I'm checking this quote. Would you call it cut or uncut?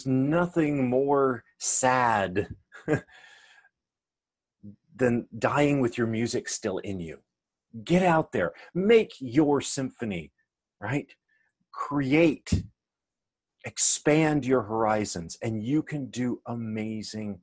uncut